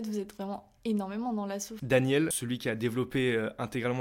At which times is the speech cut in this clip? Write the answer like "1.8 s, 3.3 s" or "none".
1.8 s